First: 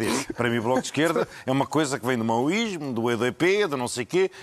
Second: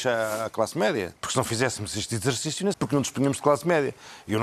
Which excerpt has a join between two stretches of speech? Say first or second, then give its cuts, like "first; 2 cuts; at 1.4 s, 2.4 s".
second; 2 cuts; at 1.2 s, 2.7 s